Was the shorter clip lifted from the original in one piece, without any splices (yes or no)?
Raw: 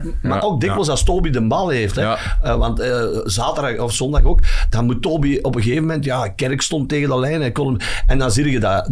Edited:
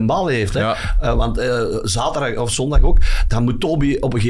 yes